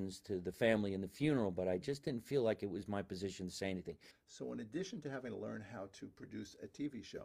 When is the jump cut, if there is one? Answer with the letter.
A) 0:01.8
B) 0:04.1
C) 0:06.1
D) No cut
B